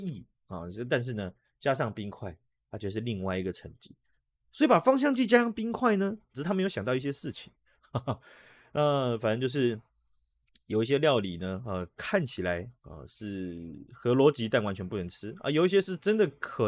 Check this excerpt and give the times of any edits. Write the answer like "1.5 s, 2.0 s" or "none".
6.3 s